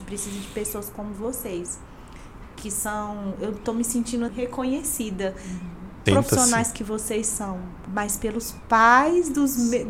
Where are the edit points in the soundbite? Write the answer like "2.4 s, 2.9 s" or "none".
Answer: 4.3 s, 6.1 s